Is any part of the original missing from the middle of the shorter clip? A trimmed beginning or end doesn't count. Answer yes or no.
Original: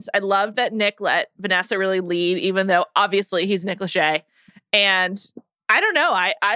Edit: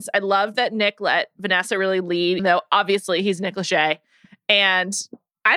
yes